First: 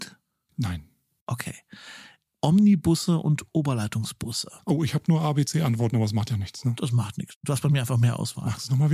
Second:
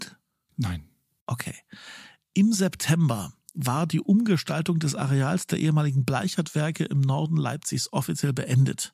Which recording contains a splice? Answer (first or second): first